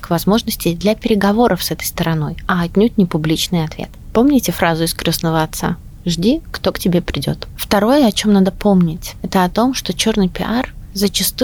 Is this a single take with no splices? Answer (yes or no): yes